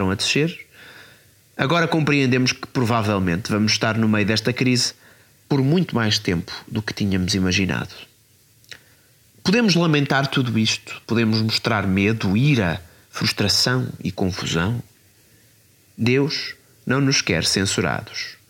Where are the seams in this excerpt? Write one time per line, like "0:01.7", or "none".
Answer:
none